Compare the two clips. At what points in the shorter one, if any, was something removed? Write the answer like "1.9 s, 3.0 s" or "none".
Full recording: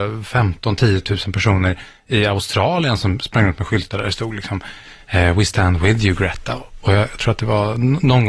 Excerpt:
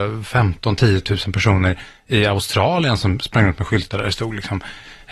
none